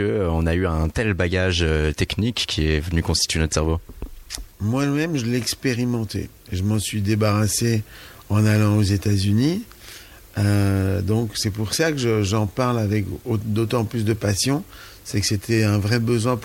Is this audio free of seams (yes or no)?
yes